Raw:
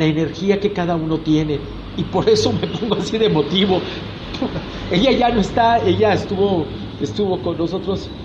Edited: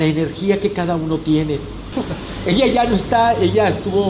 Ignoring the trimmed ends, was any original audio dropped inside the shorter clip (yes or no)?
yes